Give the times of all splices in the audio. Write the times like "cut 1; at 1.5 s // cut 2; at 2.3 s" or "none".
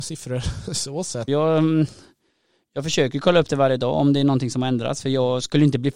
cut 1; at 1.3 s